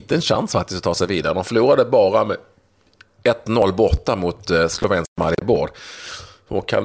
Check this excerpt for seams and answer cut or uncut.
uncut